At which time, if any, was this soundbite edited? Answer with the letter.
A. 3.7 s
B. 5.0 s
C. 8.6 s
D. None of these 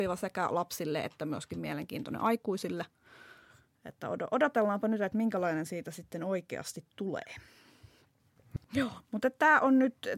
C